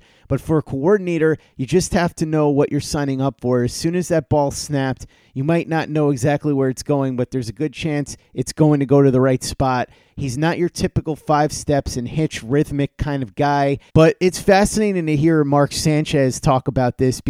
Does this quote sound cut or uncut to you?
cut